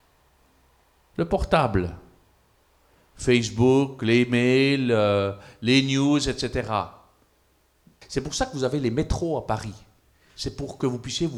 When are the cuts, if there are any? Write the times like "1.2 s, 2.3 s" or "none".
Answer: 8.0 s